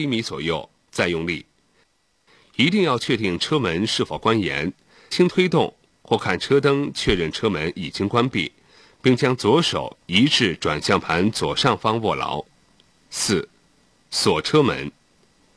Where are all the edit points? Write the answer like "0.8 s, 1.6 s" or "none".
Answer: 5.1 s